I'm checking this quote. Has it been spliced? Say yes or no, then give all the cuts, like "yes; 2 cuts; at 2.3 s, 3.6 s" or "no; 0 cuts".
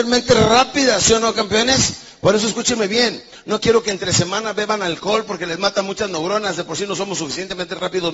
no; 0 cuts